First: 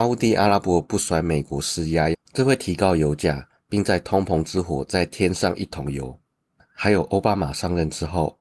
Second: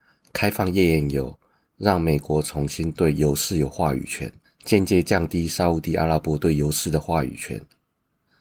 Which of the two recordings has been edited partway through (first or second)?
first